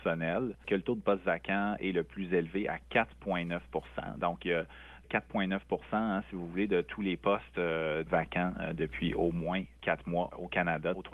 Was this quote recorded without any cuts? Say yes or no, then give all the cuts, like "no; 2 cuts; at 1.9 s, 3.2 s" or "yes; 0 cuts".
no; 1 cut; at 8.1 s